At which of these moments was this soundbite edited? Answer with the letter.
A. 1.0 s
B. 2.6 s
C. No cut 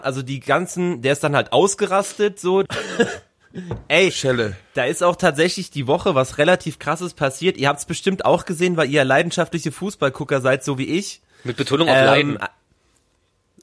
B